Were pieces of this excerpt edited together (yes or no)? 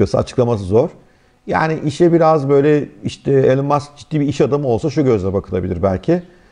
no